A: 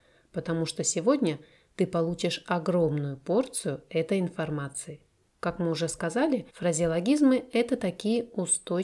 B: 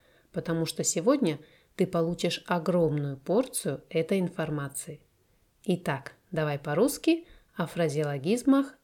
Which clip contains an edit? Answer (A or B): A